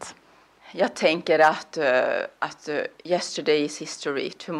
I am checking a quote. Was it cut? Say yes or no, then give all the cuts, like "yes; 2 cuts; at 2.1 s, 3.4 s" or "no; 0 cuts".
no; 0 cuts